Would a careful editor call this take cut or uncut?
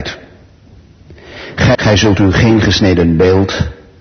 cut